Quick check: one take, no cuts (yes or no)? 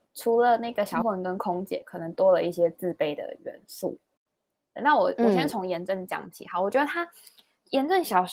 no